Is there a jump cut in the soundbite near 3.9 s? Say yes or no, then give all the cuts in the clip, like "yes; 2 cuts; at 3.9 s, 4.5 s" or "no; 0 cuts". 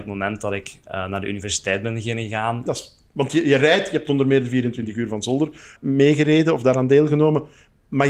no; 2 cuts; at 2.7 s, 5.8 s